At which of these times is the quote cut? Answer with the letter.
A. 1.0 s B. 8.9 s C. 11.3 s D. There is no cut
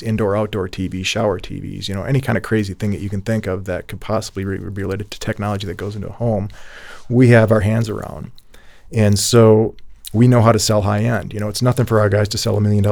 D